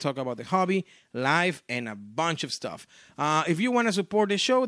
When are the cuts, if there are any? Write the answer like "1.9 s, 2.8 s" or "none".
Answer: none